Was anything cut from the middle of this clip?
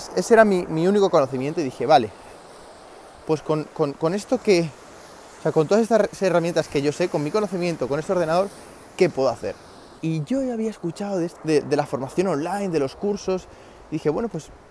yes; 2 cuts; at 10.0 s, 11.4 s

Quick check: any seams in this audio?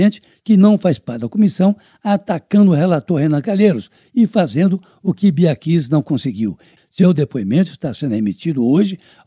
yes; 1 cut; at 6.8 s

